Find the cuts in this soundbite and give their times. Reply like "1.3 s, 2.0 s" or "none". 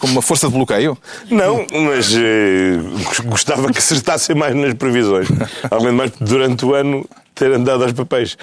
6.1 s